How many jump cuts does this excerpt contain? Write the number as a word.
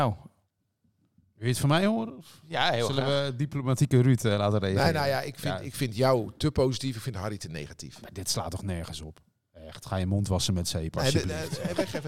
zero